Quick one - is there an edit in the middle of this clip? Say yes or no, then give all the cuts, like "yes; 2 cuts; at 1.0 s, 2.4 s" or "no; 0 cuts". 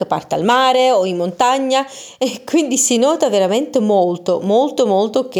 no; 0 cuts